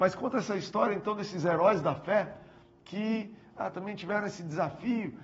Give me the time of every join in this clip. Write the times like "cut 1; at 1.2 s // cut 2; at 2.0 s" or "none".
cut 1; at 3.7 s